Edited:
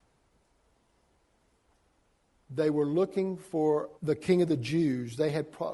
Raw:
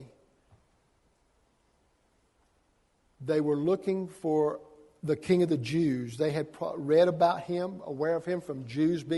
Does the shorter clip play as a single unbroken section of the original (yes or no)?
no